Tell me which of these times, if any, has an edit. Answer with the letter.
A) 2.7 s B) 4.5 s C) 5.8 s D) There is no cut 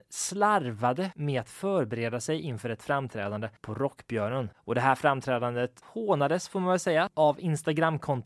C